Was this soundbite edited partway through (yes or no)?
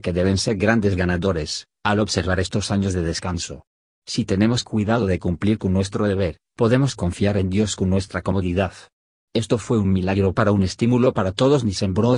no